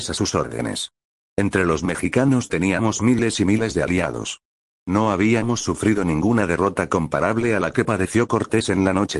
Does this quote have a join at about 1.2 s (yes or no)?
no